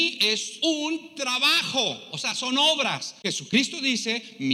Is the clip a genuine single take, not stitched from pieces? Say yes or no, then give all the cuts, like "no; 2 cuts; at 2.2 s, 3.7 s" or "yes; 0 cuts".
no; 1 cut; at 3.2 s